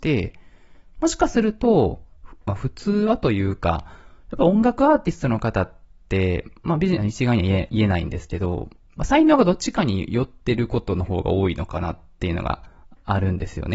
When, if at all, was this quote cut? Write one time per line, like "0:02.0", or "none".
0:07.0
0:09.0